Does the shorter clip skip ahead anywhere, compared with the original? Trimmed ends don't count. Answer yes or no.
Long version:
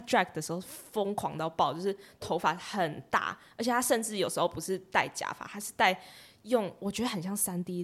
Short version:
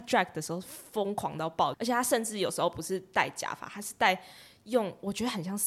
yes